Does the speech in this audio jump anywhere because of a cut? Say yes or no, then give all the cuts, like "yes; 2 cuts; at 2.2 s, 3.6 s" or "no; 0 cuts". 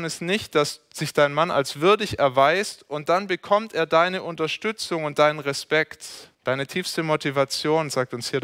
yes; 1 cut; at 6.3 s